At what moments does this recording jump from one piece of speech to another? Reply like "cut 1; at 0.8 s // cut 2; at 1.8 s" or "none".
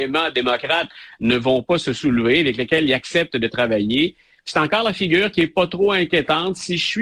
none